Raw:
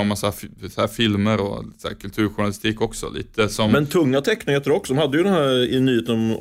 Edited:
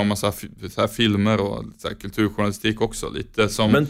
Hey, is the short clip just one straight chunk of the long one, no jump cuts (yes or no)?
yes